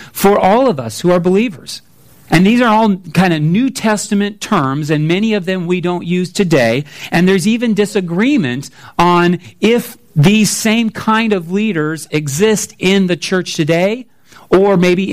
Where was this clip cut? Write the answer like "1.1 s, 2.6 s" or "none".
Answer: 2.3 s